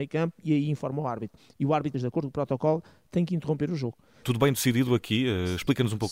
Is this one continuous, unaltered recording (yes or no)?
no